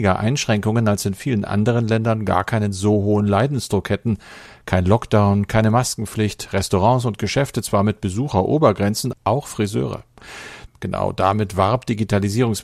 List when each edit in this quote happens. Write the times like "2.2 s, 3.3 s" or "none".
9.1 s, 10.7 s

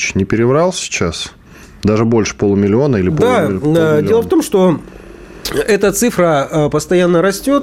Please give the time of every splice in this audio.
none

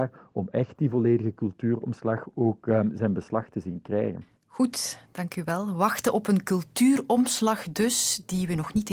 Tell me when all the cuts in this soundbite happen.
none

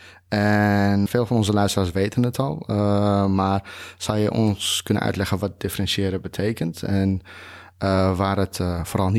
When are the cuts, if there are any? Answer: 1.1 s

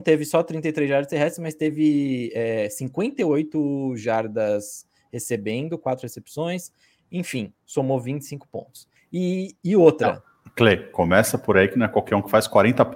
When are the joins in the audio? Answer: 9.0 s

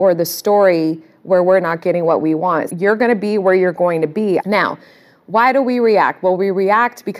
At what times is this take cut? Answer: 2.7 s, 4.4 s

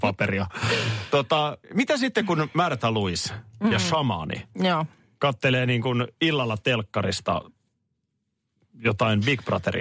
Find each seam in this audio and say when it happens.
1.6 s

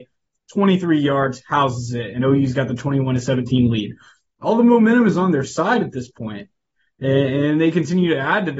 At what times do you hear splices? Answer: none

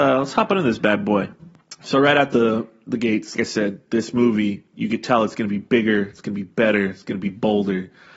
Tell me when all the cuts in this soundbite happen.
3.4 s

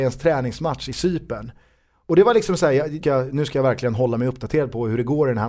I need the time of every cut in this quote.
3.0 s

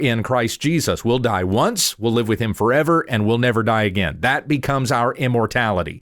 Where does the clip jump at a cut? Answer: none

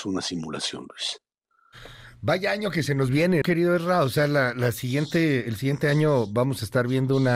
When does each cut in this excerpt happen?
3.4 s

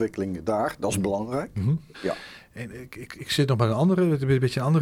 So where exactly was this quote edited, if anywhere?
1.9 s

